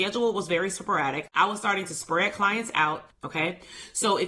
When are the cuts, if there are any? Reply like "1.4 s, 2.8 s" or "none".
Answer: 3.1 s